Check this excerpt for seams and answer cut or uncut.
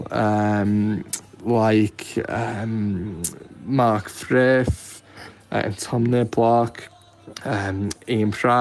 uncut